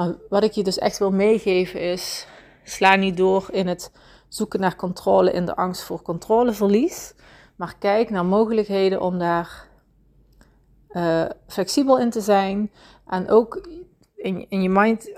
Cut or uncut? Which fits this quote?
uncut